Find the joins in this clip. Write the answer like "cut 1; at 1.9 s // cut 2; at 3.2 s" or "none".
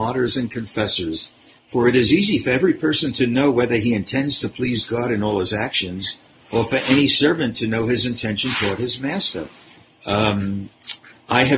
cut 1; at 1.6 s // cut 2; at 10.0 s